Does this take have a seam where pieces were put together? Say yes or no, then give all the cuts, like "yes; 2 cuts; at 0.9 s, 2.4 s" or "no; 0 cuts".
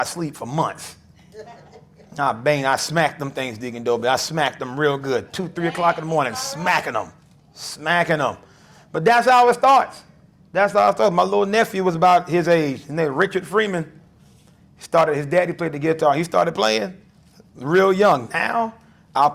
no; 0 cuts